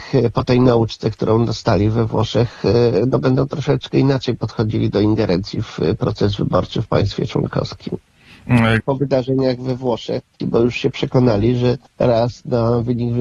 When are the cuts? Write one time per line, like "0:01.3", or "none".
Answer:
0:08.8
0:10.4
0:11.9

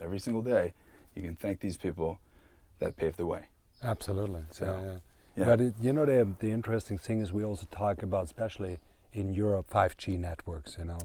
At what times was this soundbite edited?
0:09.7

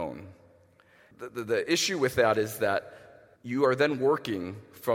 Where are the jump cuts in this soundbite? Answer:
0:01.1
0:03.4

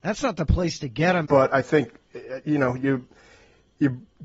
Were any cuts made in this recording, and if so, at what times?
0:01.2

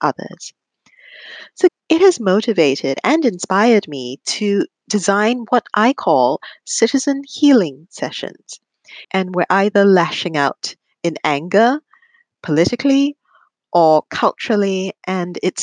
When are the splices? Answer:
0:01.7
0:09.0

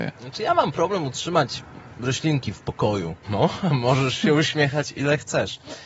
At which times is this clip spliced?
0:03.2

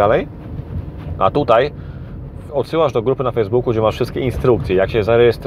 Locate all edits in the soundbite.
0:02.5

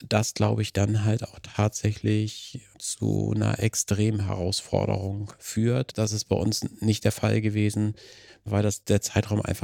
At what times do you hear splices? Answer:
none

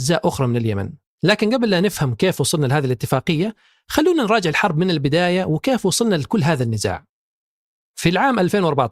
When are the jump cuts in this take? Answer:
0:01.1

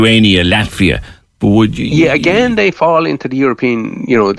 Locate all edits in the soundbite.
0:01.3

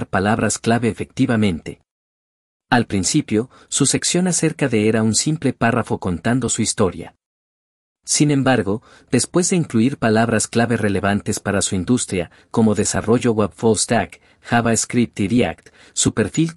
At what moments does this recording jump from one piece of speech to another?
none

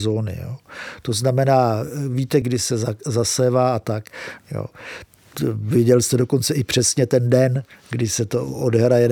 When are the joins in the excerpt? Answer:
0:02.4
0:04.4

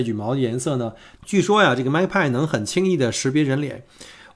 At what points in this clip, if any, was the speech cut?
0:01.2

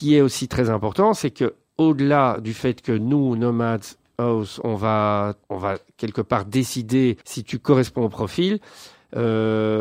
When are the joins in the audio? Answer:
0:05.4
0:07.2

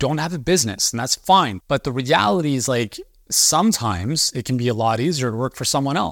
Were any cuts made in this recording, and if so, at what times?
0:01.6

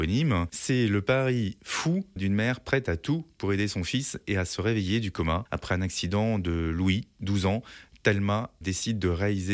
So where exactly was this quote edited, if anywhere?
0:08.6

